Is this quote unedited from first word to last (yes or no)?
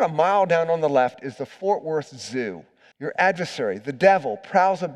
no